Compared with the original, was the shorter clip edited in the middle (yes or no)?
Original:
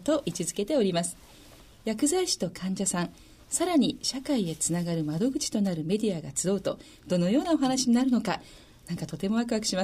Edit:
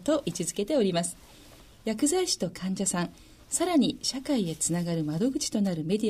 no